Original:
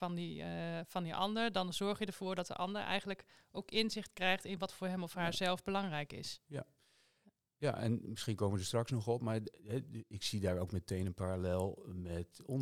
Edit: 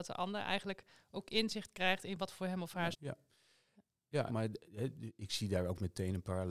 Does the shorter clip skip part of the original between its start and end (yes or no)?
yes